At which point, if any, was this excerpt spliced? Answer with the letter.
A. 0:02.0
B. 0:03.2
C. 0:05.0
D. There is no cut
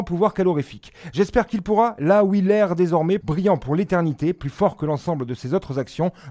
B